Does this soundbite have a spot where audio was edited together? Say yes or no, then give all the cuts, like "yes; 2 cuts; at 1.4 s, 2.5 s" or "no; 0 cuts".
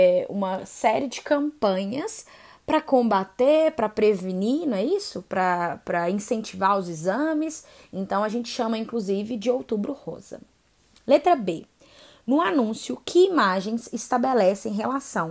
no; 0 cuts